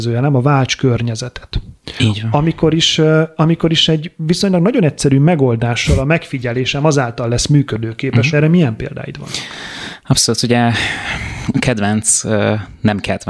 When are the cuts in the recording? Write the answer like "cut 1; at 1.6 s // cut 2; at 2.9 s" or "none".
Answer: cut 1; at 8.3 s